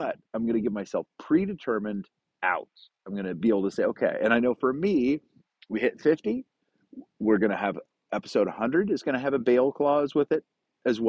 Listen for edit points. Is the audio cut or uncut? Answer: uncut